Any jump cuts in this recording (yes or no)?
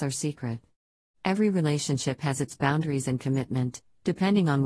no